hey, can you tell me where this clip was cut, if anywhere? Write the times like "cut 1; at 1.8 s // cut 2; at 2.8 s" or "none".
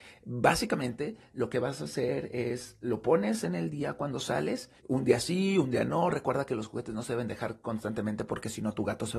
cut 1; at 4.8 s